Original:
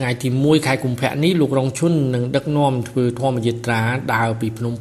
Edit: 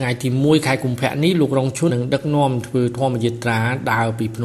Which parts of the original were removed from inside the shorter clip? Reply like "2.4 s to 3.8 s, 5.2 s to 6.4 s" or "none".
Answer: 1.9 s to 2.1 s